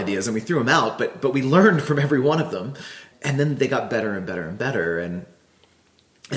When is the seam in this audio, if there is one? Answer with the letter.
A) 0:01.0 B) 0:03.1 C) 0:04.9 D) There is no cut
B